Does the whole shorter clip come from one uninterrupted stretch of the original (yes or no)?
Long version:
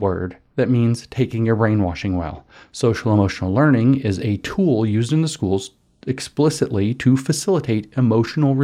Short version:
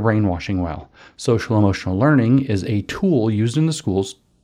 yes